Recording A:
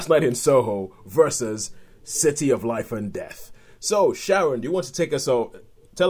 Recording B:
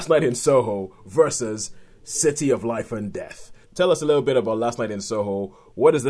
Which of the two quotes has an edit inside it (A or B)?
B